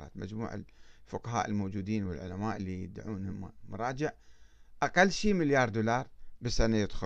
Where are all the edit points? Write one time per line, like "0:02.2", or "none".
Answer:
none